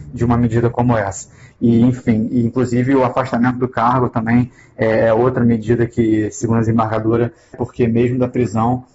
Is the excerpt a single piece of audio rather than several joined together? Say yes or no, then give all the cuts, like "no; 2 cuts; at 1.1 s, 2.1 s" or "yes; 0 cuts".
no; 2 cuts; at 1.5 s, 7.5 s